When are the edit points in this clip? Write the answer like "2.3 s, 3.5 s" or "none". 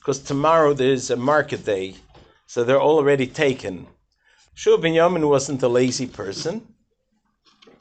4.4 s

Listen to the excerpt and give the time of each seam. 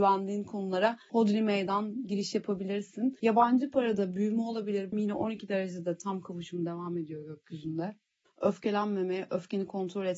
4.9 s, 8.3 s

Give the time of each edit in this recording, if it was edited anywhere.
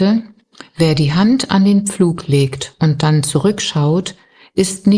none

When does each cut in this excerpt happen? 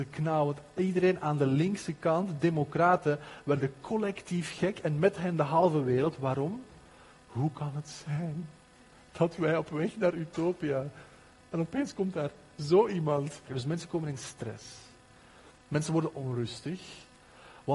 13.5 s

